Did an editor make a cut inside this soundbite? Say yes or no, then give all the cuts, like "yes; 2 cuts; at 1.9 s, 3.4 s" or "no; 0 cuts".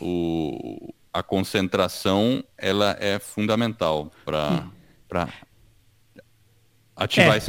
yes; 1 cut; at 1.1 s